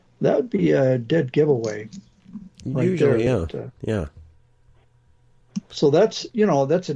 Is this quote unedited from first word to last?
yes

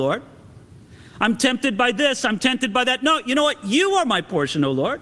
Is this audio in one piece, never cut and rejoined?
yes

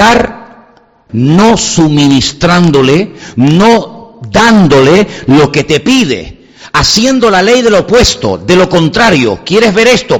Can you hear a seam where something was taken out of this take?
yes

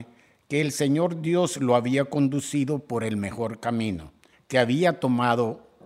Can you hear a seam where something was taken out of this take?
yes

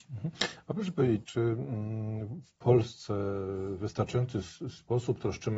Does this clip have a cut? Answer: yes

